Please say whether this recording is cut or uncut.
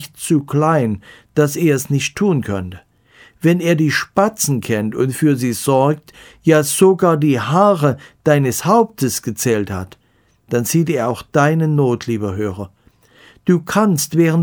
uncut